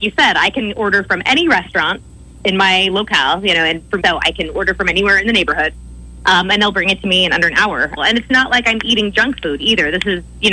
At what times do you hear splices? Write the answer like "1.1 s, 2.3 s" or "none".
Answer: 4.0 s, 8.0 s